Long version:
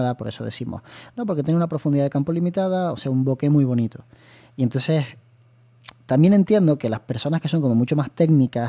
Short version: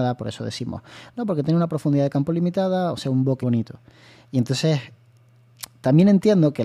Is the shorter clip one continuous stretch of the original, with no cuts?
no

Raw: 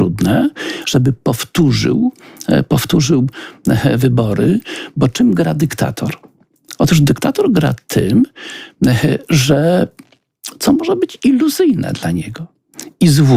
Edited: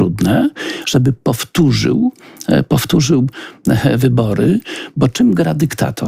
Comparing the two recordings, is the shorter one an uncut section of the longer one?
yes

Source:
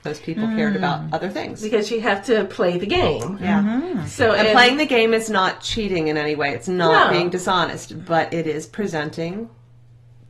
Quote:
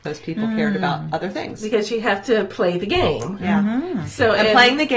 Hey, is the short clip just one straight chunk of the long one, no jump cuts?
yes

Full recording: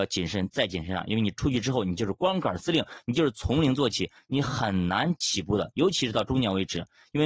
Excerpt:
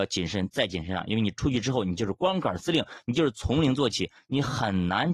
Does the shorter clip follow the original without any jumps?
yes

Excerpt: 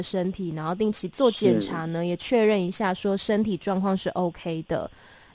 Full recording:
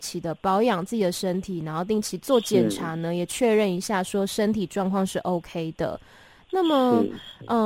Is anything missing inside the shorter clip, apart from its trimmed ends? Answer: no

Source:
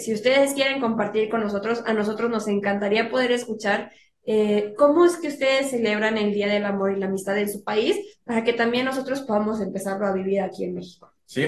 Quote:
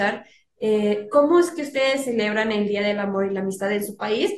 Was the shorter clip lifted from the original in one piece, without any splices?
yes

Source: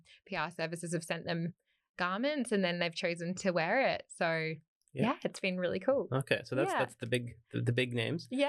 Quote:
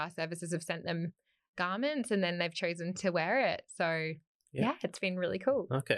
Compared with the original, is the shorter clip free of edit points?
yes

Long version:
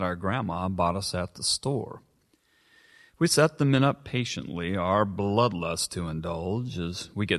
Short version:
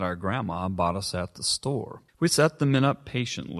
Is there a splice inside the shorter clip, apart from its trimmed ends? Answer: yes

